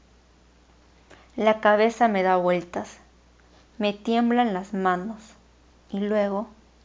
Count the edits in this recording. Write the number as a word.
one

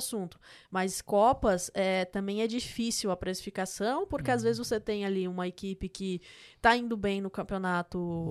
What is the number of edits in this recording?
zero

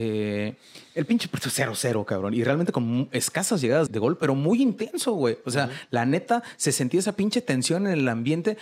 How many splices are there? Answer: one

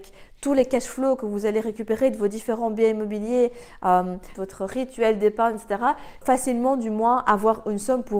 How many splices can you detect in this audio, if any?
two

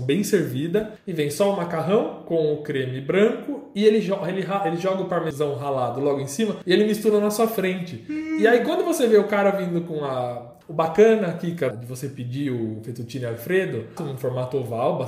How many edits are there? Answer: two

